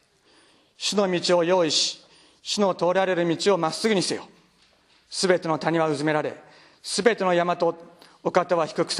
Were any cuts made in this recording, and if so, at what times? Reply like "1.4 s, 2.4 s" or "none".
none